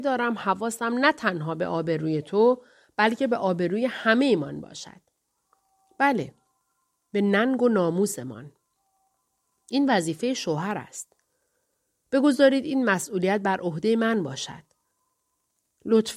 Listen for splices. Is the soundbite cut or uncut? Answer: uncut